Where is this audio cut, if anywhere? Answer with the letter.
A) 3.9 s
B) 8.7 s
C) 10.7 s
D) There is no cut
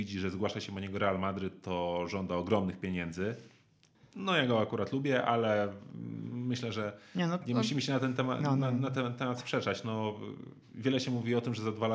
A